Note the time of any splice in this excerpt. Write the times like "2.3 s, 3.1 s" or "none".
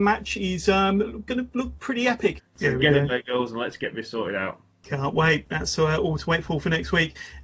2.4 s